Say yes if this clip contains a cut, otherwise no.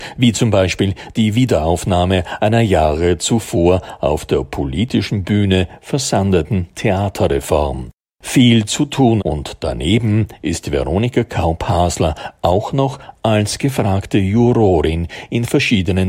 yes